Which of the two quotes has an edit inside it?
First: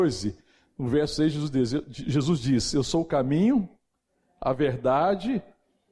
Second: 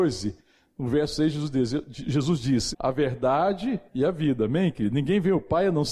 second; 2 cuts; at 2.7 s, 3.9 s

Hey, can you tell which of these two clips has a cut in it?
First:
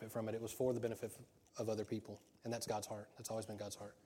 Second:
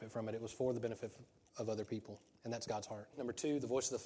second; 1 cut; at 3.1 s

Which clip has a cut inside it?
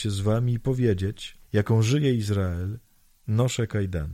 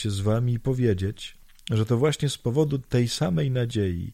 first; 1 cut; at 1.4 s

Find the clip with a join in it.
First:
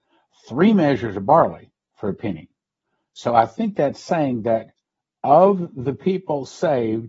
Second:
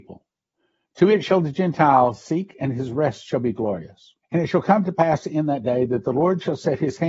second; 1 cut; at 4.2 s

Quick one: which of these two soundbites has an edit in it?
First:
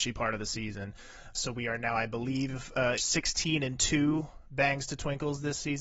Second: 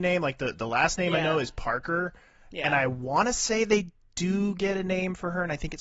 first; 2 cuts; at 1.3 s, 3.0 s

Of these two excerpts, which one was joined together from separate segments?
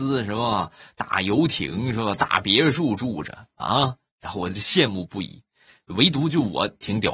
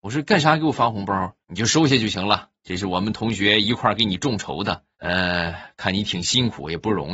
second; 2 cuts; at 1.4 s, 4.9 s

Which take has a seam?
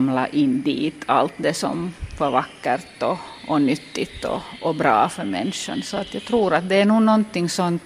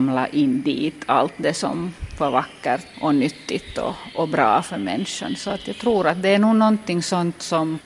second; 1 cut; at 2.9 s

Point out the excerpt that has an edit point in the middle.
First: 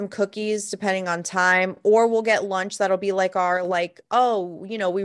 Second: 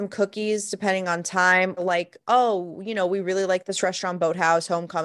second; 1 cut; at 1.8 s

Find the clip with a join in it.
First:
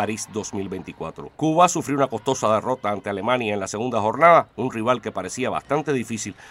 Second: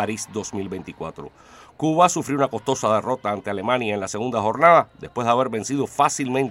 first; 2 cuts; at 1.3 s, 4.5 s

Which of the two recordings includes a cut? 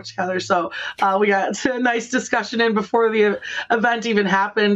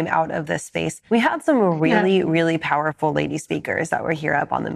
second; 1 cut; at 1.1 s

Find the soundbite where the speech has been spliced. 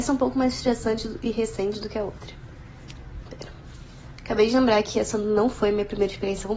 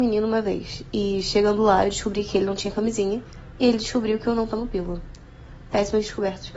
first; 1 cut; at 3.3 s

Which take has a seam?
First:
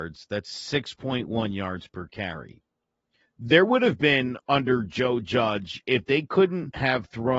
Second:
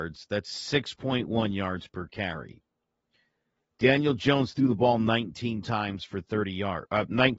first; 1 cut; at 3.2 s

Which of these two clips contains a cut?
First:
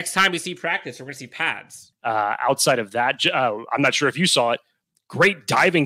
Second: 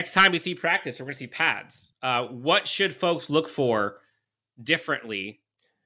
first; 1 cut; at 1.9 s

